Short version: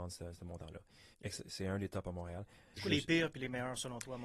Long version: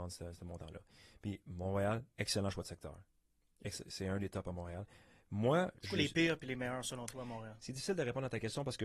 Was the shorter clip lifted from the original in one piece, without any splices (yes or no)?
no